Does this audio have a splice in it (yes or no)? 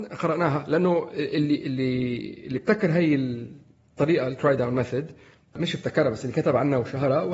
yes